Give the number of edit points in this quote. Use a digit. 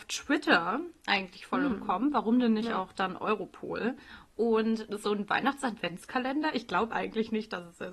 0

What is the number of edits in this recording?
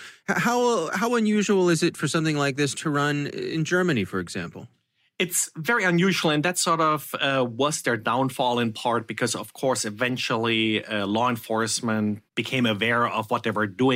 0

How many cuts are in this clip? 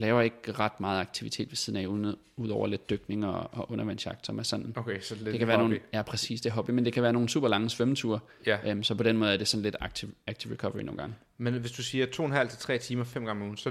0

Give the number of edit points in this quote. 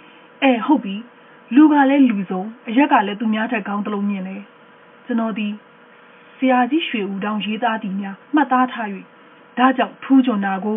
1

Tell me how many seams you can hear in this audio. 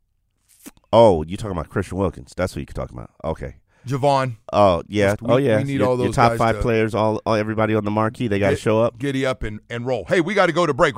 1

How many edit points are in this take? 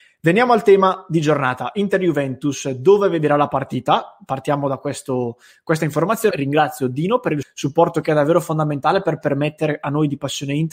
2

